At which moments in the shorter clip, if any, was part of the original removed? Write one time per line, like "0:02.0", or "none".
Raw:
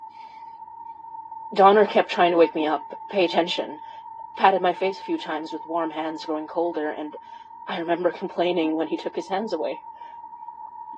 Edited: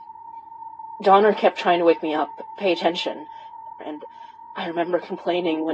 0:03.8